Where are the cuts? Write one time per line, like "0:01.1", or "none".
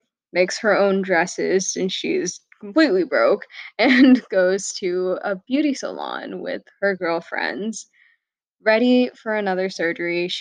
none